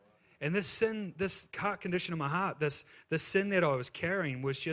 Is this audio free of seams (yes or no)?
yes